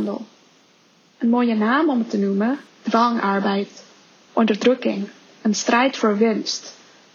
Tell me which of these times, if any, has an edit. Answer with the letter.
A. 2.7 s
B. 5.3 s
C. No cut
A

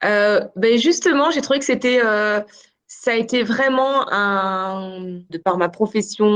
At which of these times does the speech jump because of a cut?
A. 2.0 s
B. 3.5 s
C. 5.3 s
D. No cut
C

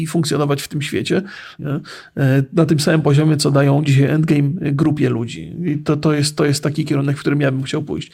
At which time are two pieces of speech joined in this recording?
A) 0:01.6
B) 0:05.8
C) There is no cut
A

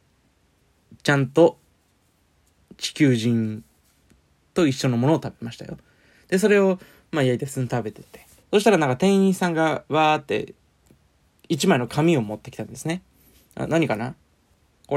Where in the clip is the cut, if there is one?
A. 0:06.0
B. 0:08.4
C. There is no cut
B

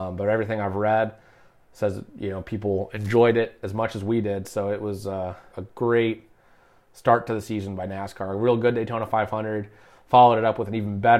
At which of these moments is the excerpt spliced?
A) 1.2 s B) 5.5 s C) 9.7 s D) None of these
B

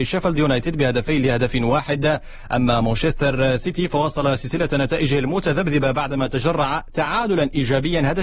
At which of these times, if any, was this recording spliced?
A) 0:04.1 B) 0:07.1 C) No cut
C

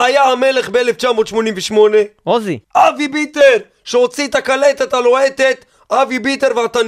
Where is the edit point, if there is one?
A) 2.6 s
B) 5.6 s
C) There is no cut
A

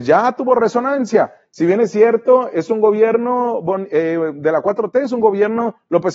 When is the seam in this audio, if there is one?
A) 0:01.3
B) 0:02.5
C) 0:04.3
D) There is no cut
D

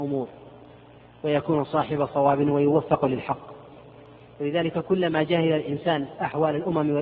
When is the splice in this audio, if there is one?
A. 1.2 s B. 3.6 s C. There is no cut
C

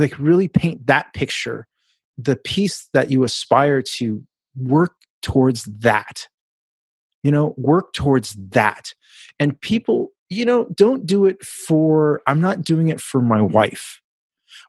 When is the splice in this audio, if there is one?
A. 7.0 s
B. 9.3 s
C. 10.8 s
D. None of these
D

